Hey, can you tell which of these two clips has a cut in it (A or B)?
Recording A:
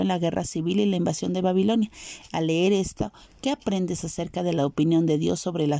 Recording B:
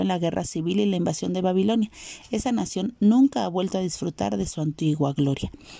A